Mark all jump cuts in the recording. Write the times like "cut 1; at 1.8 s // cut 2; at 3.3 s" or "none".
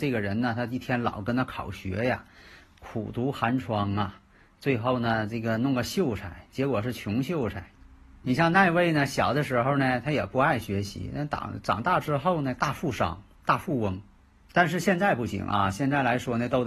cut 1; at 13.4 s